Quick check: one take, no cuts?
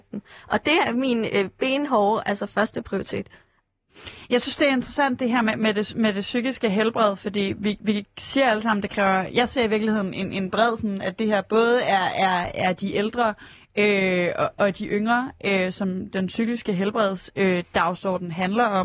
yes; 0 cuts

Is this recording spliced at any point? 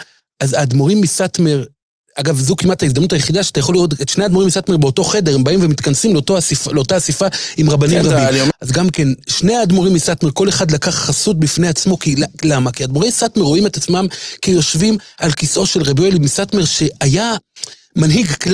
yes; 1 cut; at 8.5 s

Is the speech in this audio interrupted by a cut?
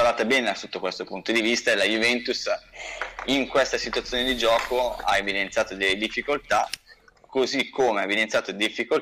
no; 0 cuts

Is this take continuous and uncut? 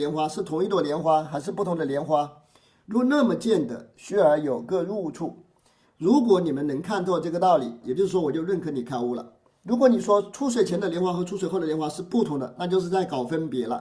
no; 3 cuts; at 7.8 s, 9.6 s, 12.5 s

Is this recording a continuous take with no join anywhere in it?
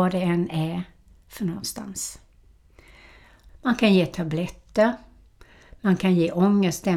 no; 1 cut; at 3.5 s

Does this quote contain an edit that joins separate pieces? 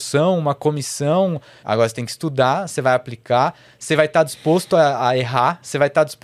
yes; 1 cut; at 1.6 s

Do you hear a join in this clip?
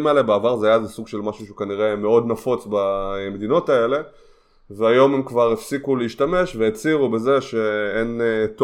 no; 0 cuts

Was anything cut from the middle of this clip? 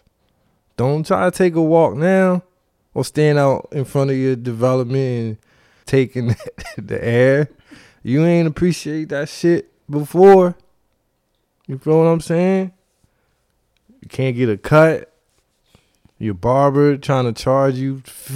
yes; 1 cut; at 5.8 s

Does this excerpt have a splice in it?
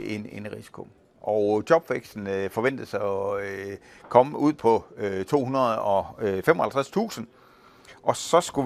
no; 0 cuts

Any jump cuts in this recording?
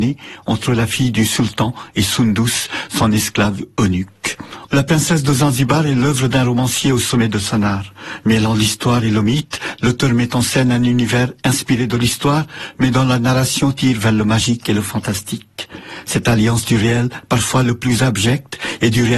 yes; 1 cut; at 4.7 s

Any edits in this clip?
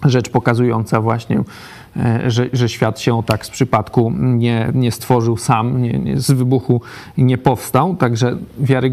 no; 0 cuts

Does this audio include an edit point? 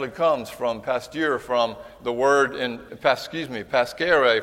yes; 1 cut; at 2.9 s

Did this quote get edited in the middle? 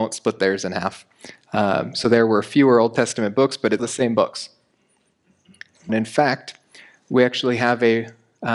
yes; 2 cuts; at 3.8 s, 5.9 s

